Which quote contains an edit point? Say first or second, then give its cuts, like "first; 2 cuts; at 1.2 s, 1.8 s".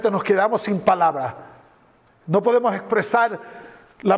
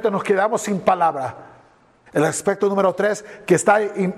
second; 1 cut; at 2.1 s